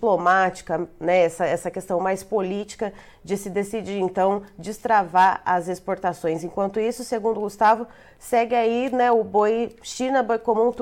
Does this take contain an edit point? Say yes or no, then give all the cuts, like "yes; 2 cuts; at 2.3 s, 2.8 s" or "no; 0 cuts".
no; 0 cuts